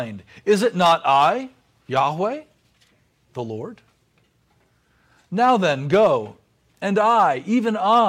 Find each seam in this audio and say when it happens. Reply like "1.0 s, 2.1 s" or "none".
none